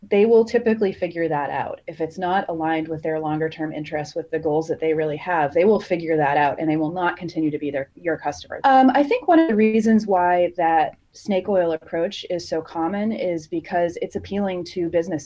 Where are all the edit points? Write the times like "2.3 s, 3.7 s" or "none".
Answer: 8.6 s